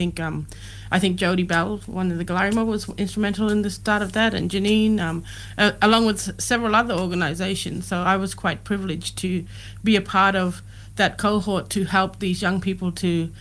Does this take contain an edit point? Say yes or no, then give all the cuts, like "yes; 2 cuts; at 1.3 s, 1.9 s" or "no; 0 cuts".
no; 0 cuts